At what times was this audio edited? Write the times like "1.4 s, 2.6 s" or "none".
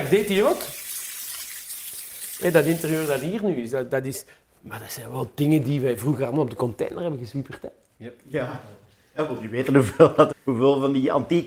4.6 s, 10.3 s